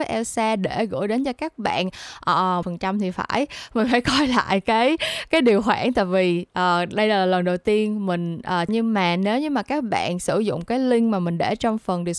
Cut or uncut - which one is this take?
cut